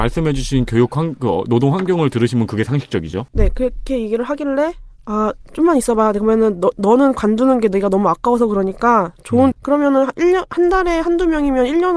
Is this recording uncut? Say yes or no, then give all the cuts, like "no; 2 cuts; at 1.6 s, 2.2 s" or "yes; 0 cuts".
no; 3 cuts; at 3.3 s, 6.7 s, 9.5 s